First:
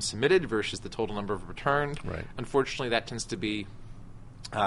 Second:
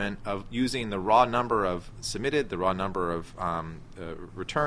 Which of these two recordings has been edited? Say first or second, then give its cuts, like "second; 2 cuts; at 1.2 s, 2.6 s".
first; 1 cut; at 2.3 s